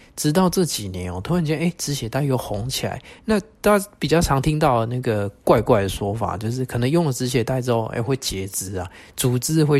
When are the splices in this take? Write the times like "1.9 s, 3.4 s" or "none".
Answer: none